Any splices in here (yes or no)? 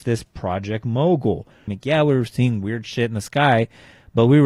yes